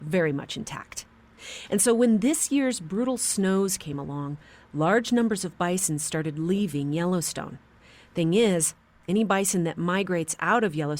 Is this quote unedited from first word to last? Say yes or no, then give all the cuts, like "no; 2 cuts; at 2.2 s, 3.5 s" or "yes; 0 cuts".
yes; 0 cuts